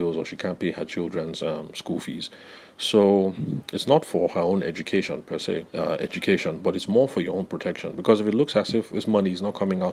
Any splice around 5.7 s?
yes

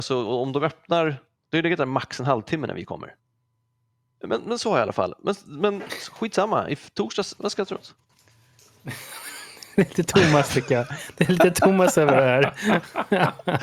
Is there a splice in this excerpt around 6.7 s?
no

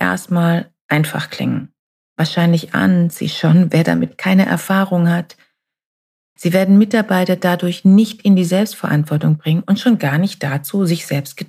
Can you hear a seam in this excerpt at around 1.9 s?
no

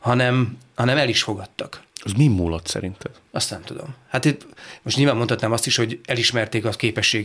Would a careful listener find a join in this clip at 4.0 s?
no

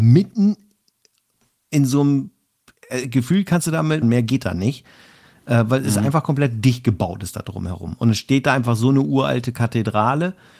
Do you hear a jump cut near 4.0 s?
yes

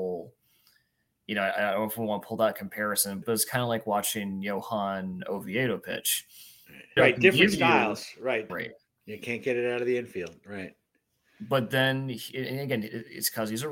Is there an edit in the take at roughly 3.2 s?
yes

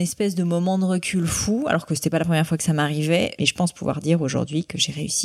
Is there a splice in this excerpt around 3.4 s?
yes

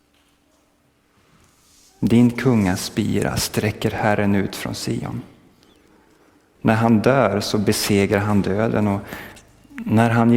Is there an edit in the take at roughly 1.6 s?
no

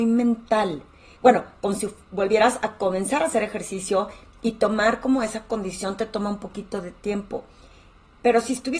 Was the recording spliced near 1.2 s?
yes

